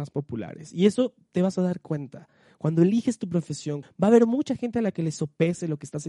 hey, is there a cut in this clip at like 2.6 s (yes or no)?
no